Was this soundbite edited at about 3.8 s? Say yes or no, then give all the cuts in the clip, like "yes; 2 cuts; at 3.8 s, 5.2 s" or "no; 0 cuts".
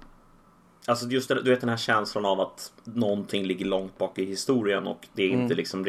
no; 1 cut; at 1.3 s